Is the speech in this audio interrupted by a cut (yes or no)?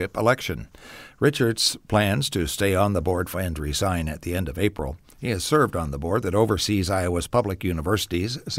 yes